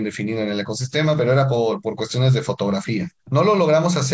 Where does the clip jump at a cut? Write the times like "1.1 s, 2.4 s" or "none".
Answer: 3.2 s